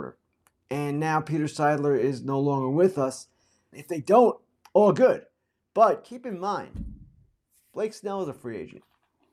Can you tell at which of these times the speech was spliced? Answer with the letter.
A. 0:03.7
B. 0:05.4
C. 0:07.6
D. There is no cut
A